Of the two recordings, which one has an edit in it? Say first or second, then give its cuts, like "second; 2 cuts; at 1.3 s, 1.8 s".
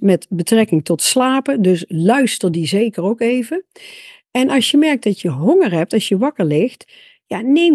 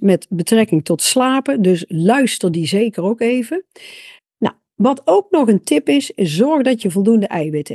second; 1 cut; at 4.2 s